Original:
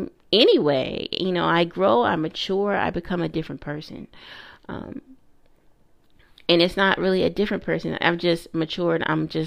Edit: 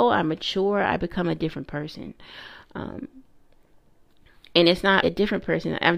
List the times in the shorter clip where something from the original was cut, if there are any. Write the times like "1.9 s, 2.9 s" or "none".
5.0 s